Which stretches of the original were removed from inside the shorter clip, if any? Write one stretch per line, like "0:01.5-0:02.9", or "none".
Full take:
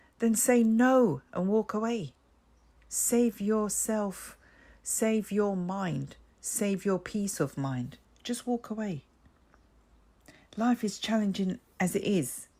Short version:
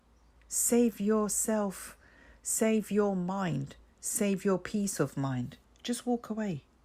none